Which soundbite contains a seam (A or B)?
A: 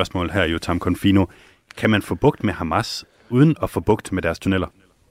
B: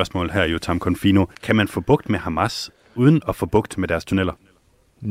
B